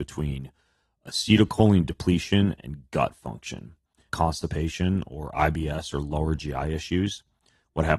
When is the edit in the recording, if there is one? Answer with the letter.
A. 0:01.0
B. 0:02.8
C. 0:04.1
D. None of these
C